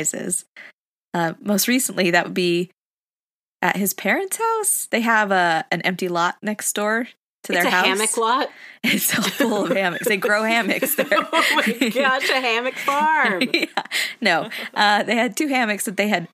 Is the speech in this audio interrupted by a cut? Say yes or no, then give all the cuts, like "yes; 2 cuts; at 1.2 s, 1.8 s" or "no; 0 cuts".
no; 0 cuts